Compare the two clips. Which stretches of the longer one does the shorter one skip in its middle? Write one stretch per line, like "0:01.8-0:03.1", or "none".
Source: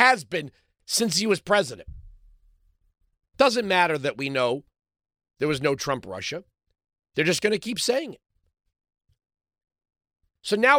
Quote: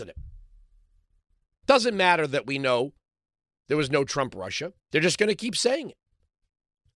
0:06.5-0:07.0